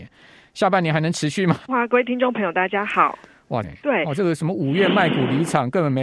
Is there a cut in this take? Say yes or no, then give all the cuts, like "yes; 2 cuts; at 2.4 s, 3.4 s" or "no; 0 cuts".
yes; 2 cuts; at 1.7 s, 3.6 s